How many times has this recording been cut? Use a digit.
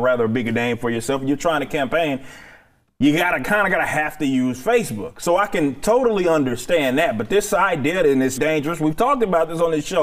1